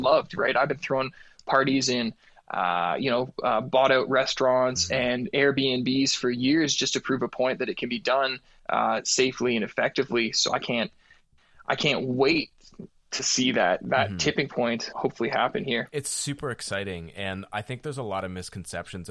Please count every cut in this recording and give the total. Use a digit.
1